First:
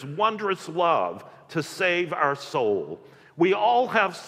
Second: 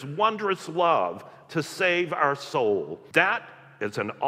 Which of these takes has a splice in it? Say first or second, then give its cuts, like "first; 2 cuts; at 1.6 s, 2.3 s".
second; 1 cut; at 3.1 s